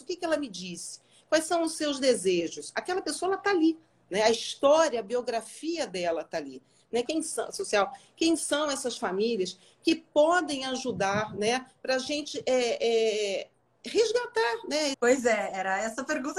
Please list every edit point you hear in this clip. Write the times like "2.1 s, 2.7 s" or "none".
7.0 s, 14.9 s

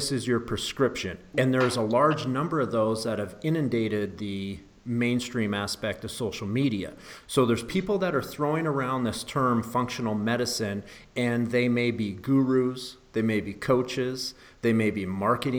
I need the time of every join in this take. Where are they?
1.3 s, 7.2 s

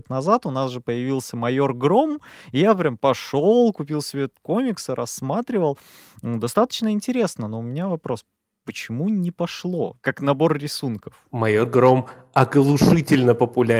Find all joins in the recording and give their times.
none

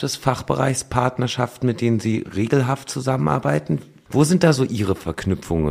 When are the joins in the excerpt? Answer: 4.1 s

